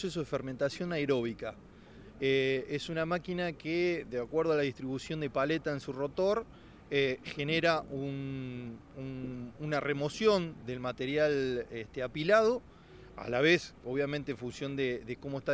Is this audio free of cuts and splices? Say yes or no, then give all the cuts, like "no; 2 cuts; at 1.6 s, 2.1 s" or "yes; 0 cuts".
yes; 0 cuts